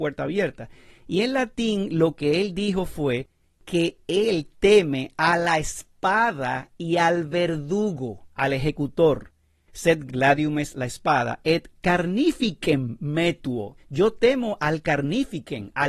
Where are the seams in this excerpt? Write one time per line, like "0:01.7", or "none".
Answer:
0:10.1
0:13.8

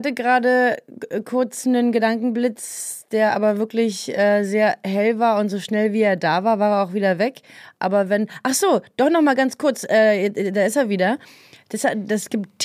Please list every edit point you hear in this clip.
none

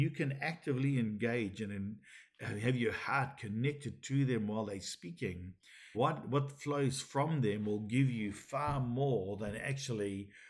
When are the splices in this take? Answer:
0:05.9

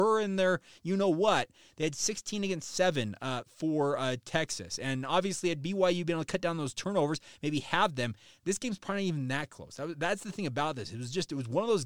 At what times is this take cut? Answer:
none

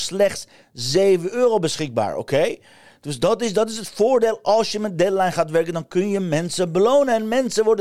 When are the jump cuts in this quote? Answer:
none

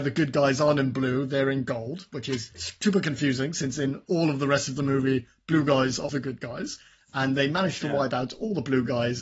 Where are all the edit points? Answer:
0:06.1

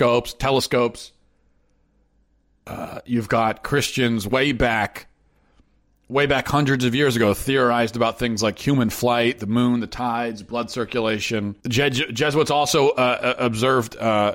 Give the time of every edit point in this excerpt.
0:11.6

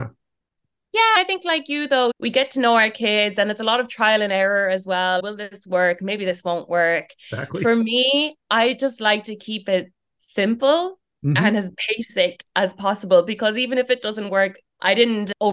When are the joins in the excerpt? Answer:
none

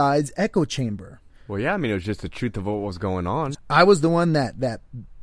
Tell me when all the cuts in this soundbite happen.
0:01.3
0:03.5

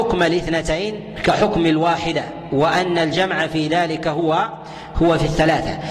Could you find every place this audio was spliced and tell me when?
none

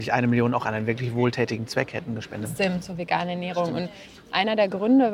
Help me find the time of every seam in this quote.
0:02.5

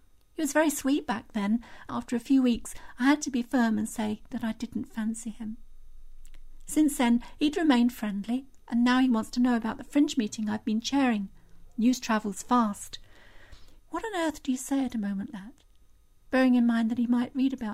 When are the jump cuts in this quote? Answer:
0:01.9
0:13.8
0:15.3

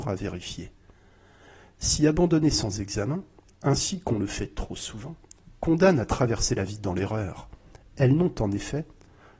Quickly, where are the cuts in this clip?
none

